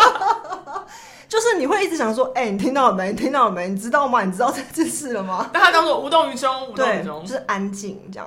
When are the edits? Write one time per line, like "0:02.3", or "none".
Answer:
none